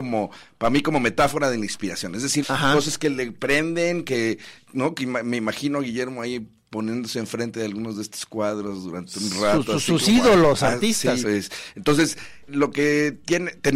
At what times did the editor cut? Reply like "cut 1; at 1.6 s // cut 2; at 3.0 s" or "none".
cut 1; at 2.4 s // cut 2; at 11.2 s // cut 3; at 12.5 s